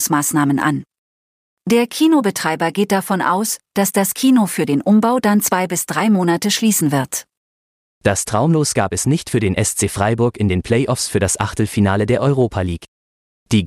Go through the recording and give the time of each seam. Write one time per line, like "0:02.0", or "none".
none